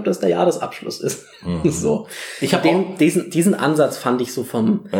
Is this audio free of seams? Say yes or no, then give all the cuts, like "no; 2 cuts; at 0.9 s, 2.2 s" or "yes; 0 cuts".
yes; 0 cuts